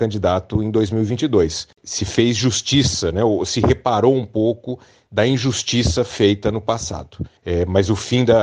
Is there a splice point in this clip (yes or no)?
yes